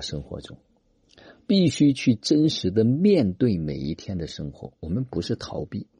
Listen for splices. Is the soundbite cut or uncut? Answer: uncut